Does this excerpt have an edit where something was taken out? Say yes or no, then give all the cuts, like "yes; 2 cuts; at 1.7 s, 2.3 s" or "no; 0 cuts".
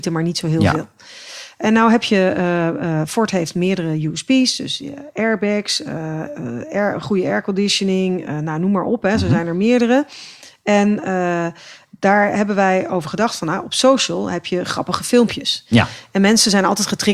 no; 0 cuts